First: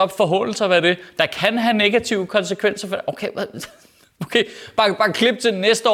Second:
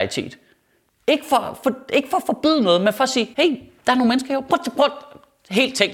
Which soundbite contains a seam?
second; 1 cut; at 3.3 s

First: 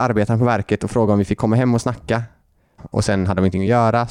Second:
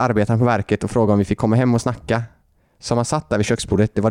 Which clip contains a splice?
first; 1 cut; at 2.8 s

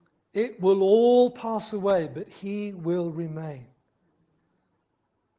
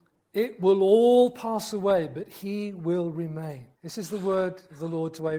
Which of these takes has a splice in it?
second; 1 cut; at 3.7 s

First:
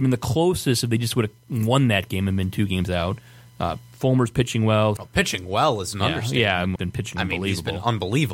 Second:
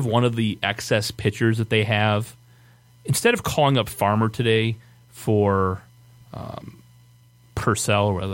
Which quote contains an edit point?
first; 2 cuts; at 5.0 s, 6.8 s

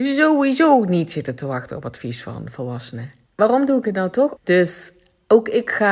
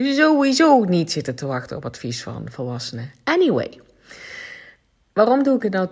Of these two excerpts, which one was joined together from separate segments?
first; 2 cuts; at 3.3 s, 4.4 s

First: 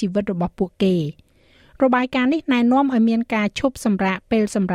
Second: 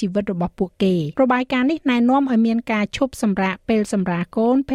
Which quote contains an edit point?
second; 1 cut; at 1.1 s

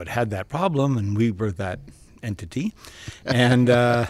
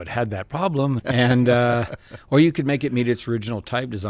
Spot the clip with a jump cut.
second; 1 cut; at 1.0 s

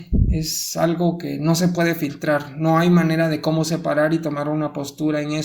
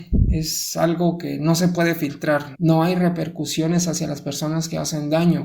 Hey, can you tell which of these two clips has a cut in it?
second; 1 cut; at 2.5 s

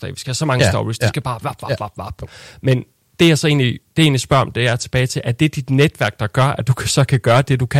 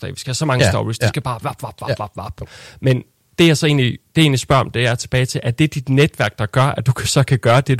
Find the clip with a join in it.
first; 1 cut; at 1.6 s

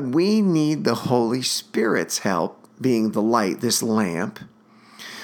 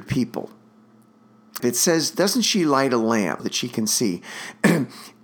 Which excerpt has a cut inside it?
second; 2 cuts; at 1.6 s, 3.4 s

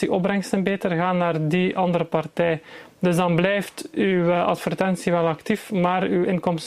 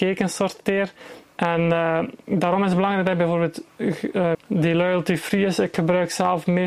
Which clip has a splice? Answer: second; 2 cuts; at 1.2 s, 4.3 s

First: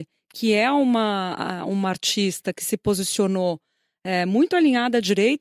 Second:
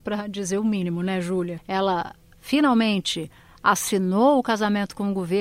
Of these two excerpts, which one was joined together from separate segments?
second; 1 cut; at 1.6 s

